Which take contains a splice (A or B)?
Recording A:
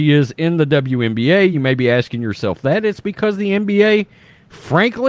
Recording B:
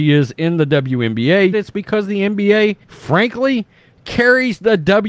B